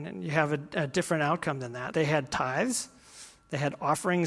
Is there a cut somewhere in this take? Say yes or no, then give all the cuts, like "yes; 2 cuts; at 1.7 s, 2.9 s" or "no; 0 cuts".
yes; 1 cut; at 1.9 s